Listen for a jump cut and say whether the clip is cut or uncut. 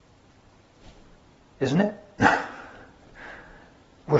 uncut